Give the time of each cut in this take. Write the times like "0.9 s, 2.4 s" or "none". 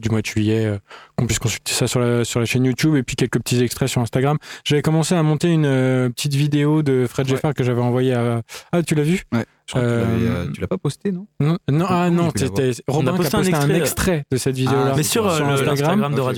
none